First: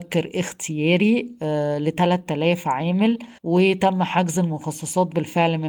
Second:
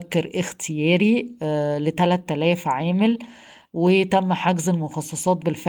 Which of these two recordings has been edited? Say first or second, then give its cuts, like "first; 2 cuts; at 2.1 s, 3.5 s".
first; 1 cut; at 3.4 s